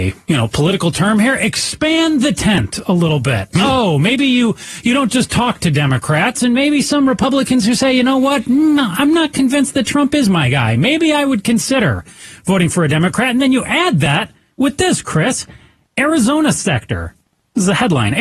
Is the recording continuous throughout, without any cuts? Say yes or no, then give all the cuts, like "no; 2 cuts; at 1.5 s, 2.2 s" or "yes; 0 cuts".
no; 1 cut; at 6.4 s